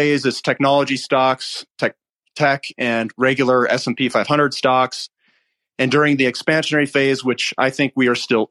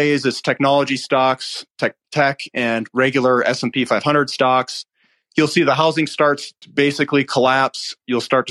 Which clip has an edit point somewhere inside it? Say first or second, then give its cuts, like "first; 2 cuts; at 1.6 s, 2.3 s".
second; 3 cuts; at 2.0 s, 5.2 s, 6.6 s